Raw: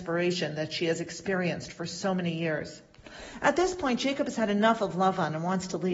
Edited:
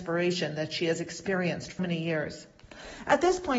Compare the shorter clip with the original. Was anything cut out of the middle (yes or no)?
yes